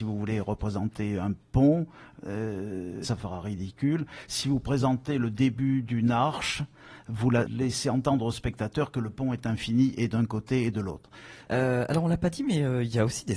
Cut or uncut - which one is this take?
cut